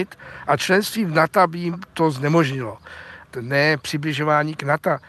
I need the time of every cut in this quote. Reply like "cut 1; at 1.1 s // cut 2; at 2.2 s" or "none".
cut 1; at 3.2 s